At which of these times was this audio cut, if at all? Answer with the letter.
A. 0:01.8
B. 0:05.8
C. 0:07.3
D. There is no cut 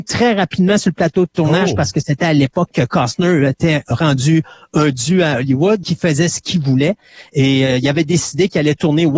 B